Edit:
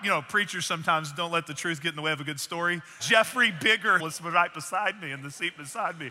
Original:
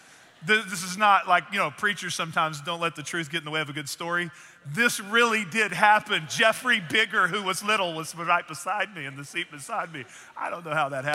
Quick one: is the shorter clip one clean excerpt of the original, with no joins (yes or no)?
no